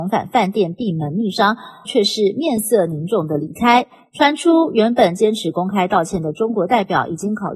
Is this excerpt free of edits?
no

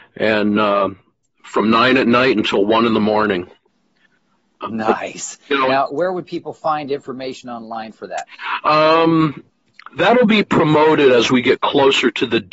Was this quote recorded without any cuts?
yes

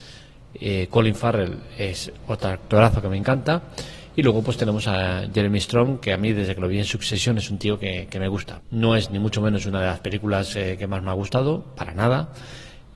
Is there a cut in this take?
yes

